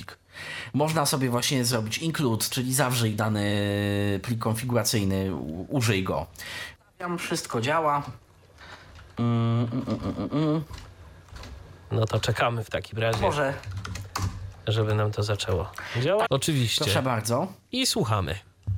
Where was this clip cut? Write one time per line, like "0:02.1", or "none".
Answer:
0:06.8
0:16.3